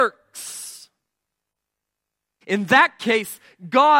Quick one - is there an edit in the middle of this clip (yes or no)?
yes